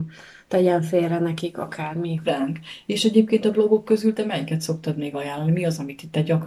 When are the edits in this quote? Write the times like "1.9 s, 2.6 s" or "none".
2.2 s